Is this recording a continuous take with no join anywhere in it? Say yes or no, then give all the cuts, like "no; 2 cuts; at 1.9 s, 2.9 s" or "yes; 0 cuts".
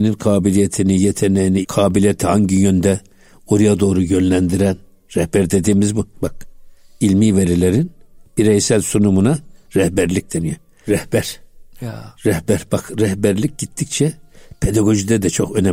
no; 3 cuts; at 1.6 s, 6.1 s, 10.8 s